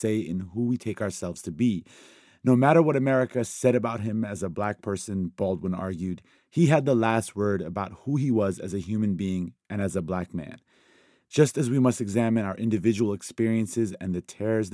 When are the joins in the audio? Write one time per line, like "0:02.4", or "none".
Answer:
none